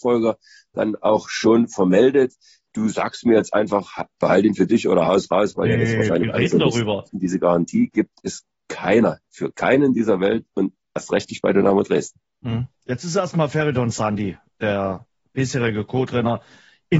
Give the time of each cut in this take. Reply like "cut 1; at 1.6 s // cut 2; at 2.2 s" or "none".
cut 1; at 7.1 s